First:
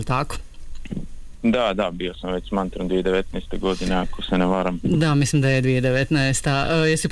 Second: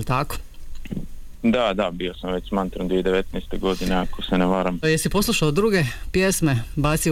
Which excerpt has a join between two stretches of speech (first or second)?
second